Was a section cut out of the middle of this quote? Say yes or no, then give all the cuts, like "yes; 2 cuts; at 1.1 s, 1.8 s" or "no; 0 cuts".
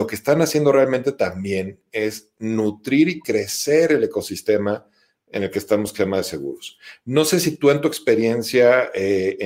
no; 0 cuts